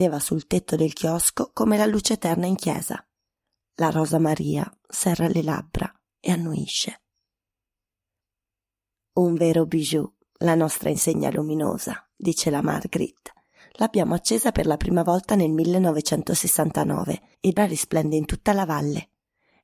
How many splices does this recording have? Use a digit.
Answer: 1